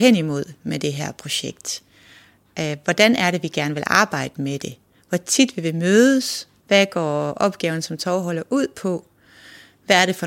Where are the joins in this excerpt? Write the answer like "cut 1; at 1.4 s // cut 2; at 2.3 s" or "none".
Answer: cut 1; at 6.6 s